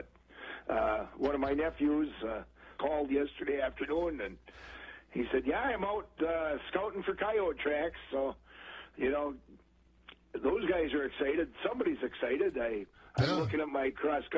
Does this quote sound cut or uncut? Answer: cut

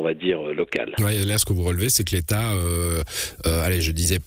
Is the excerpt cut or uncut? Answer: uncut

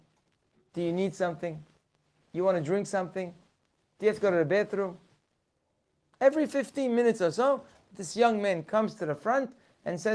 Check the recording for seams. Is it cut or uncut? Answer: uncut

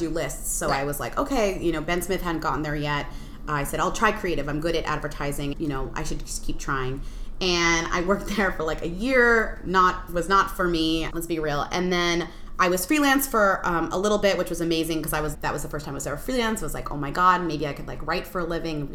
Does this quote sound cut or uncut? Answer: cut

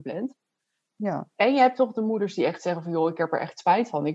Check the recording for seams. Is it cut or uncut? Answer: uncut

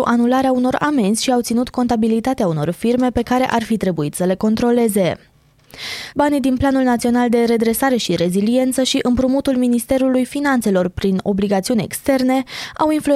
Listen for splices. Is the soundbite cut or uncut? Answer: cut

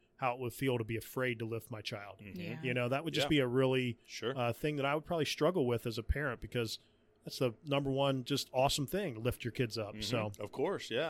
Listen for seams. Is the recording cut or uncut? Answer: uncut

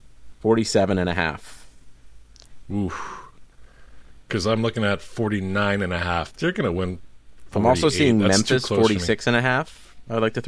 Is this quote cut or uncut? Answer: cut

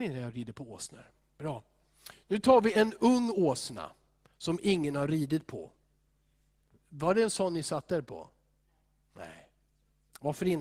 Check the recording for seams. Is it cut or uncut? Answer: uncut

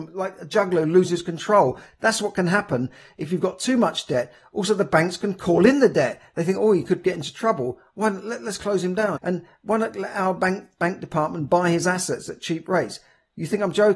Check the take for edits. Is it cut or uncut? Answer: cut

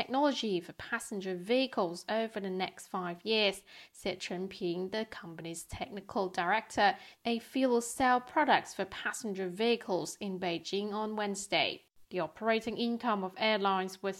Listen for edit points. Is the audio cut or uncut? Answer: cut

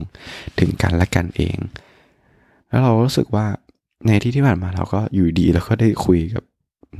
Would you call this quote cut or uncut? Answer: uncut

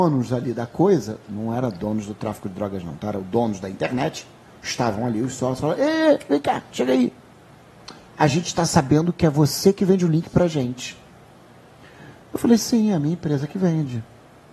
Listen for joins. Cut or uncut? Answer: uncut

